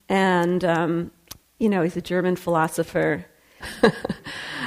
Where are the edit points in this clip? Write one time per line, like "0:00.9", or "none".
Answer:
0:03.6